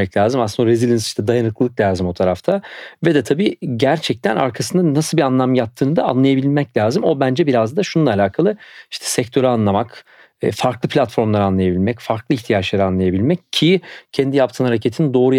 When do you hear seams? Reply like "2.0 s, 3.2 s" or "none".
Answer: none